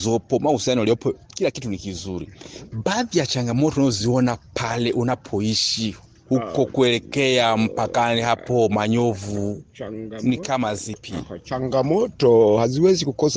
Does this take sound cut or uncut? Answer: cut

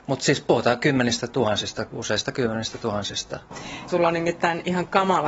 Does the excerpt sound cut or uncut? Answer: cut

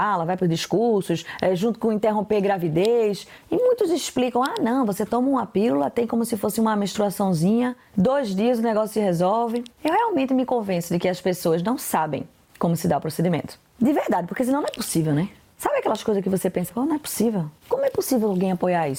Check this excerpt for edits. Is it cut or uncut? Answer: cut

